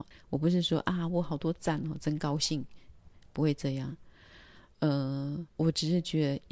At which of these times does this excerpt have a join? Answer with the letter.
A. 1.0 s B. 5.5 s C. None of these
B